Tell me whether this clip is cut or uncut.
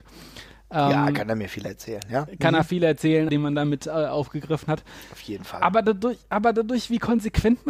cut